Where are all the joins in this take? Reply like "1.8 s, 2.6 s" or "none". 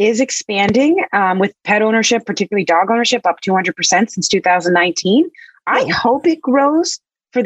none